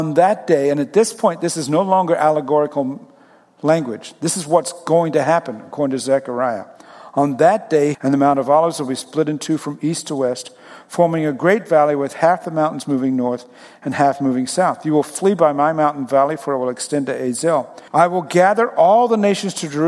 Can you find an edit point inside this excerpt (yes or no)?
yes